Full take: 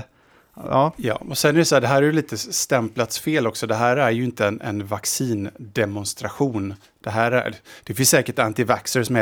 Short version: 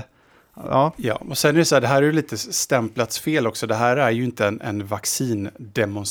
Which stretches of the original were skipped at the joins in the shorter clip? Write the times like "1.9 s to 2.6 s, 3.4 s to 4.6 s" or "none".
none